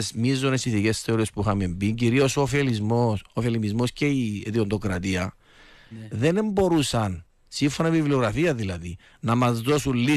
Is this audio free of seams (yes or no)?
no